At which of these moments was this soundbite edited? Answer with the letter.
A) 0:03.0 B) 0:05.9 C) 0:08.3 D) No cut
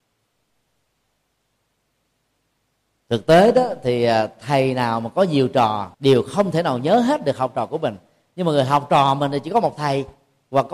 B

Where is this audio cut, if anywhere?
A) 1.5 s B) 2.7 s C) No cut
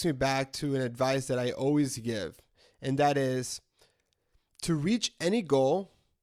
C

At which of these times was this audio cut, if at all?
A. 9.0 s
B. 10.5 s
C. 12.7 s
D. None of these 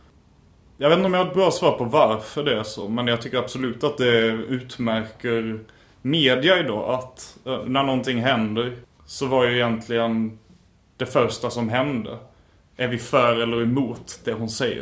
A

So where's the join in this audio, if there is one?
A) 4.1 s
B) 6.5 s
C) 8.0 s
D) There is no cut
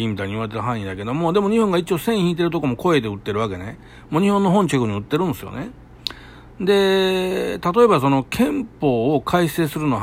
D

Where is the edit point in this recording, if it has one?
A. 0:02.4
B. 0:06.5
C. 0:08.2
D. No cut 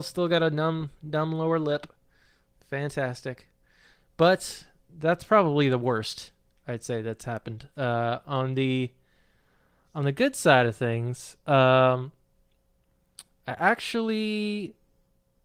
D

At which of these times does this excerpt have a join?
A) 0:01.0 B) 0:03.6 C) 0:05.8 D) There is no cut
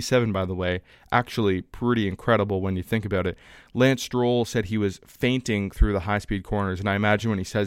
B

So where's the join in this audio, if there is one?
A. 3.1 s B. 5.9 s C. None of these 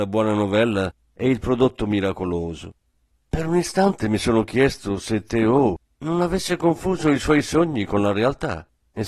B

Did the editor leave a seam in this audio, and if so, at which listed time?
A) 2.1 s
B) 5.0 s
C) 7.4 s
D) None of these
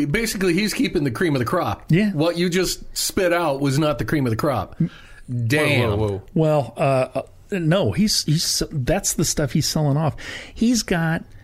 D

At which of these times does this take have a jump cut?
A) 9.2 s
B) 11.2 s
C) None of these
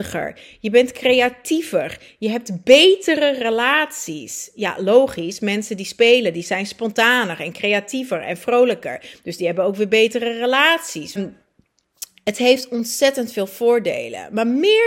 B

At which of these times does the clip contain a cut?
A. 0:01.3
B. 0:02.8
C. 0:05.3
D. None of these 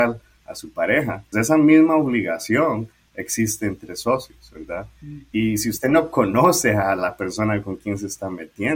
A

